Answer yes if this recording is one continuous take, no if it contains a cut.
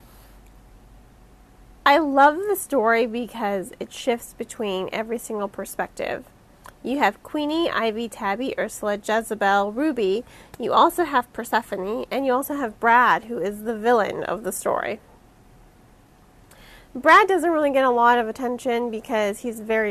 yes